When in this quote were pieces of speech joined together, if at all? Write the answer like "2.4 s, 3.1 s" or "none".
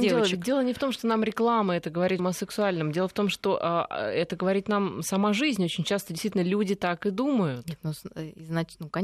2.2 s